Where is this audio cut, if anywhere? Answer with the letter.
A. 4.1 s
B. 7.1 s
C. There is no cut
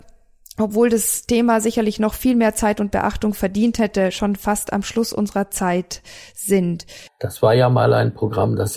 B